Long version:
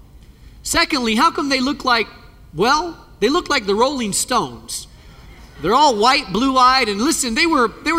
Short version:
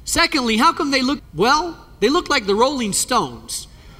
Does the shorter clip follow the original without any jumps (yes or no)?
no